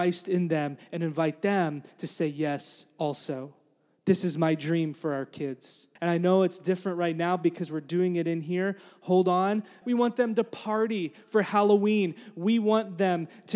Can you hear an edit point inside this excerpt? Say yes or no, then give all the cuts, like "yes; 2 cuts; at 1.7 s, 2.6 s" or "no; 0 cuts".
yes; 2 cuts; at 6.0 s, 9.8 s